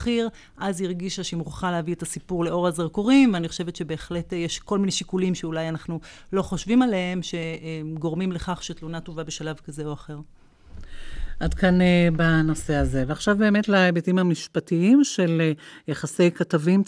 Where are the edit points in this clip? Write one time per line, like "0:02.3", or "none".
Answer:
none